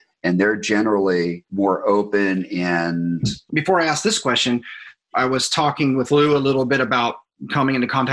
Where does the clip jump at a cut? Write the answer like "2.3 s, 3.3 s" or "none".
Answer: 3.5 s